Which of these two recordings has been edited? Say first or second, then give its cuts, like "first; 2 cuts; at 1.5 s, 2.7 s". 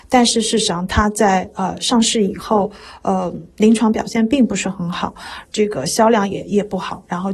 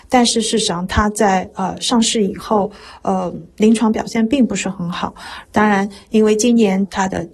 second; 1 cut; at 5.5 s